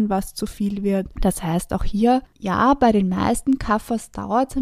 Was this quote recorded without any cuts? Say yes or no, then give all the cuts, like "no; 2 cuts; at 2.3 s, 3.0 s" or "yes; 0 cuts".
no; 1 cut; at 1.1 s